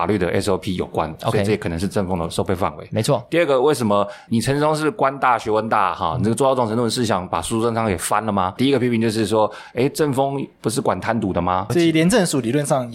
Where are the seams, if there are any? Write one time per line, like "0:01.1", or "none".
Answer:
0:08.6
0:11.7